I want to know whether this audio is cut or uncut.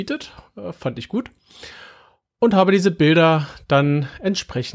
uncut